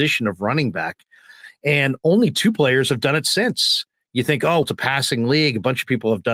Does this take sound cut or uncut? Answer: cut